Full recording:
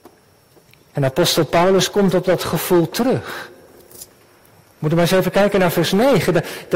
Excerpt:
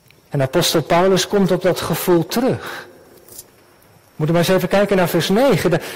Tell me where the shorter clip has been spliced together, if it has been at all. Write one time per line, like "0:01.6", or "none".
none